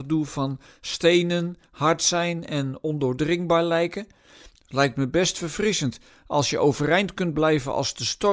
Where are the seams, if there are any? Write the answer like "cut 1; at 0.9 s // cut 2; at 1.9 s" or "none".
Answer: cut 1; at 4.6 s